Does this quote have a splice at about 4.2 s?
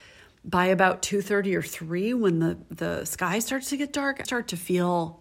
yes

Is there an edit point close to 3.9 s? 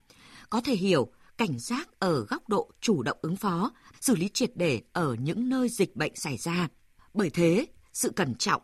yes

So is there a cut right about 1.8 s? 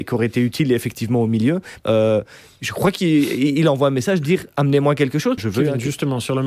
yes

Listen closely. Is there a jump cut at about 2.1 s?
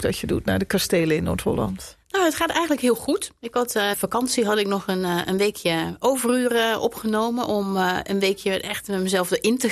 no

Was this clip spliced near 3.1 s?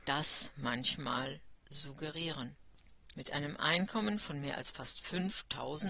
yes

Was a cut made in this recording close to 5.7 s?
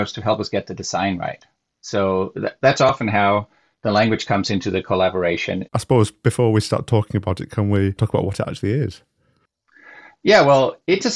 yes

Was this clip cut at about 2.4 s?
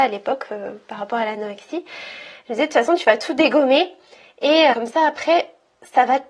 no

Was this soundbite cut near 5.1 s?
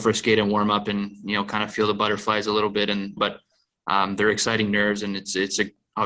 no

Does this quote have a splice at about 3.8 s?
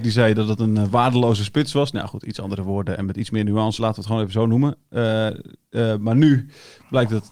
yes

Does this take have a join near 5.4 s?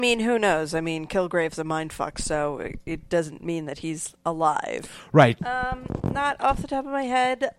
yes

